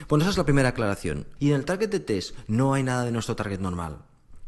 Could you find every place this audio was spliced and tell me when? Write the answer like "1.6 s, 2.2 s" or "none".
1.4 s